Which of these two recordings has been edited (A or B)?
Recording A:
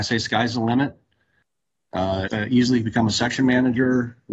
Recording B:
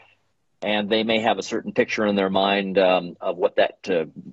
A